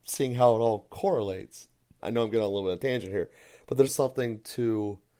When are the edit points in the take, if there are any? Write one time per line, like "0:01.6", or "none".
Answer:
0:02.0
0:03.9